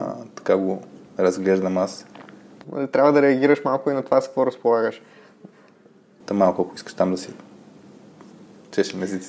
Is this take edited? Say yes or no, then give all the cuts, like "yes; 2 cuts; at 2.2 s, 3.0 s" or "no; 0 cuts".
yes; 2 cuts; at 2.6 s, 6.2 s